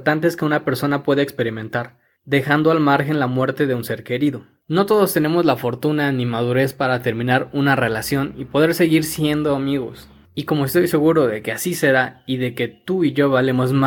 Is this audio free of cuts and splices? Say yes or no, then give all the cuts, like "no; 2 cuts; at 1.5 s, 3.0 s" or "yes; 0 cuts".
no; 2 cuts; at 4.6 s, 10.2 s